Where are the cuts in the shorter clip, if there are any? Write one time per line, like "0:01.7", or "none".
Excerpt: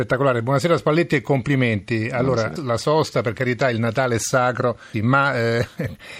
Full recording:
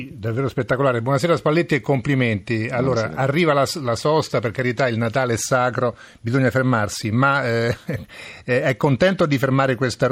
0:02.6
0:04.9